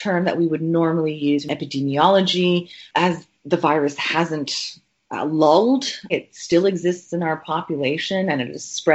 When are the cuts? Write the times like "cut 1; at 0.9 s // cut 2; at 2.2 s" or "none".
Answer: cut 1; at 6.1 s